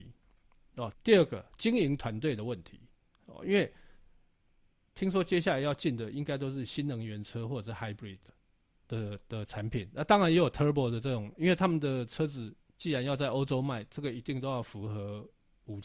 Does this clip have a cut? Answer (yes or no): yes